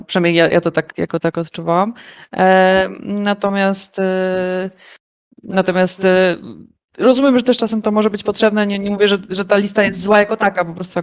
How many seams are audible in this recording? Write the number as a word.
zero